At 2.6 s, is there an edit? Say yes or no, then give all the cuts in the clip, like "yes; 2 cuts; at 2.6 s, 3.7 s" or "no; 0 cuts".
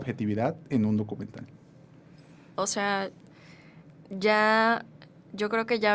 yes; 1 cut; at 2.6 s